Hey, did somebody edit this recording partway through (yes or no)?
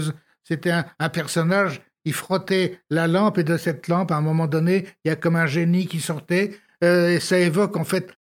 no